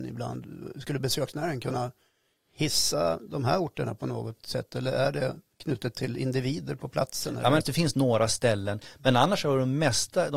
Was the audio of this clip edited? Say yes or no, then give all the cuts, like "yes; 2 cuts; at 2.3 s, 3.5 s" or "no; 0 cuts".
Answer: yes; 1 cut; at 7.6 s